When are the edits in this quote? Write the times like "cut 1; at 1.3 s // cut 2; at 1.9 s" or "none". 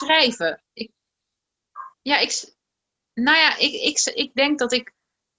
cut 1; at 1.9 s